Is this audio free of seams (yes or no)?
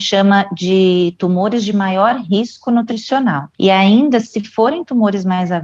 yes